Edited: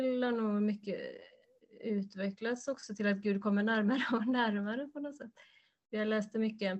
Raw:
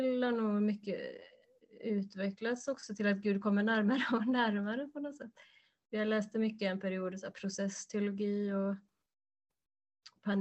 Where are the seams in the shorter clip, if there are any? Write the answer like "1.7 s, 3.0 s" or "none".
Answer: none